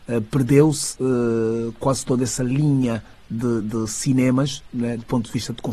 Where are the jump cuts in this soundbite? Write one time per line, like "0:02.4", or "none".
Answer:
none